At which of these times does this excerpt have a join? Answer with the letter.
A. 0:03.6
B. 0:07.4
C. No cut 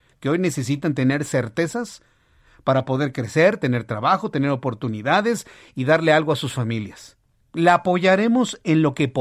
B